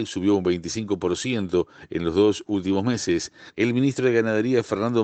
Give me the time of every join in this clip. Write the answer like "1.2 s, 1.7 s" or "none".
3.5 s